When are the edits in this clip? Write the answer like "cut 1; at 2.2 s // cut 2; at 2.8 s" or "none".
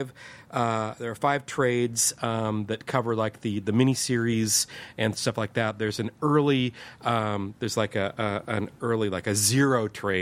none